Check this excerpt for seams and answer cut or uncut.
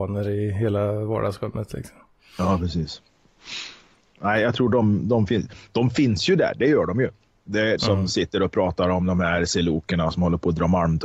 cut